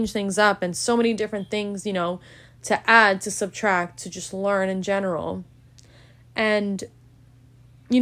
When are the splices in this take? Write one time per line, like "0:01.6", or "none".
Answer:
none